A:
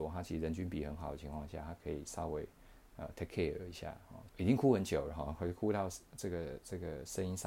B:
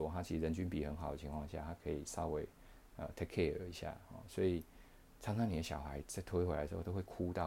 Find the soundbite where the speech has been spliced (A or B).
A